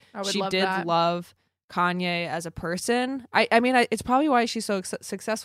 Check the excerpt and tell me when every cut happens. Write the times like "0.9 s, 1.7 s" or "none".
none